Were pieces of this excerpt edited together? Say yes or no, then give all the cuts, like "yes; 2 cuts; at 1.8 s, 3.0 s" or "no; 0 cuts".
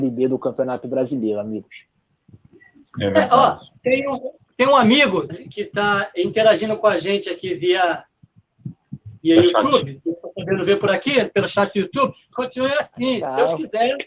yes; 2 cuts; at 5.3 s, 12.3 s